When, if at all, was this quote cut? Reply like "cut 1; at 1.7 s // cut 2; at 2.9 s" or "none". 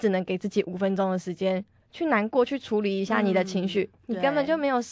cut 1; at 1.8 s // cut 2; at 4.0 s